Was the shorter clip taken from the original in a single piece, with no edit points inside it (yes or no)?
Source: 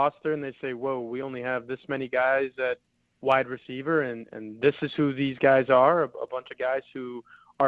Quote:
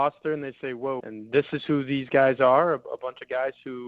no